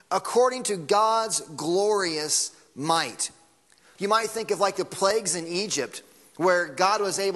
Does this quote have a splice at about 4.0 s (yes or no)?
yes